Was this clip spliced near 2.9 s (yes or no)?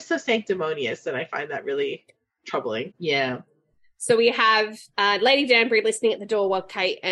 yes